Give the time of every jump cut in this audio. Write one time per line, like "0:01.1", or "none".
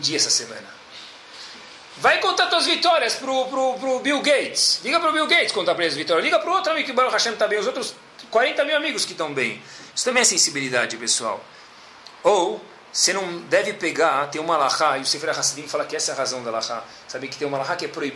none